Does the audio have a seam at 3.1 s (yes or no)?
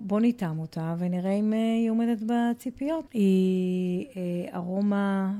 yes